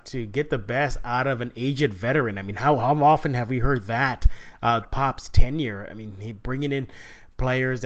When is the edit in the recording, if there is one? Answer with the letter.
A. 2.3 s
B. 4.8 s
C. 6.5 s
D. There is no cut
B